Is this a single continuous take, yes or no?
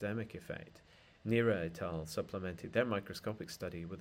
yes